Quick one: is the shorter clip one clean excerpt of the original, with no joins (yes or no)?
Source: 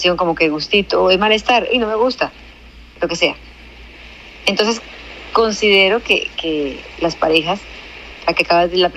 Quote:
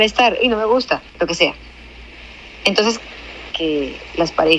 no